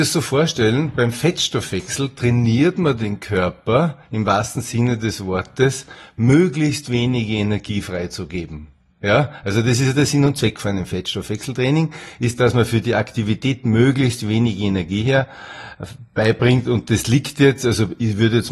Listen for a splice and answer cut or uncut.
uncut